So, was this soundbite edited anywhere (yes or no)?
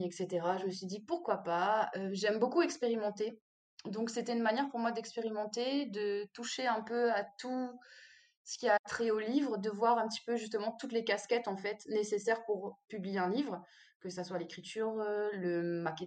no